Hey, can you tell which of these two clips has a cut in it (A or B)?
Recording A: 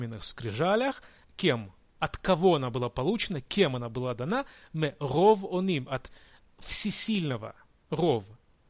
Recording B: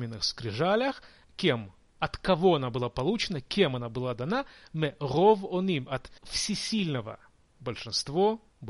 B